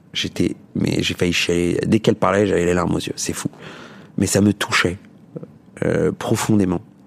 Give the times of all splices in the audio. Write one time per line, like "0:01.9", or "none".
none